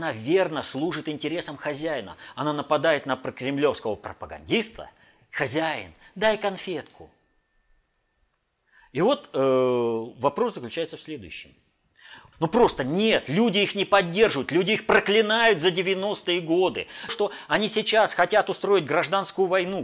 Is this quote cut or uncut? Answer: cut